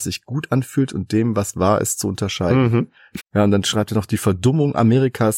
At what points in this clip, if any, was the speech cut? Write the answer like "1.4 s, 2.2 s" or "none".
3.2 s